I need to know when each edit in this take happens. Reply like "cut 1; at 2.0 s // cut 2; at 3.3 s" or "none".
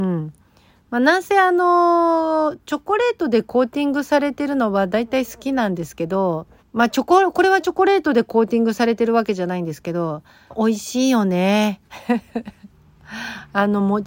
cut 1; at 6.6 s // cut 2; at 10.5 s // cut 3; at 12.7 s